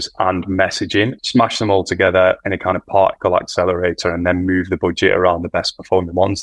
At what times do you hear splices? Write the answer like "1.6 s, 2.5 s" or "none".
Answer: 1.2 s